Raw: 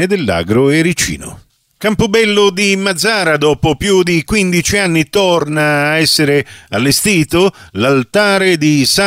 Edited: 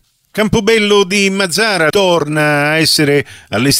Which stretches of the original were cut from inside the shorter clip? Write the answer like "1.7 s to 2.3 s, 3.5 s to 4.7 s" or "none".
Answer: 3.4 s to 5.1 s